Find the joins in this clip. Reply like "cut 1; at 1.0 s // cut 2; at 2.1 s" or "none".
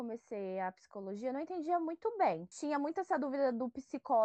none